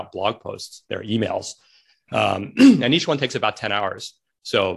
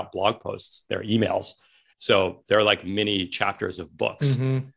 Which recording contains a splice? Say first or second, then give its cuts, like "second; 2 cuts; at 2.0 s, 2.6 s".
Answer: second; 1 cut; at 1.9 s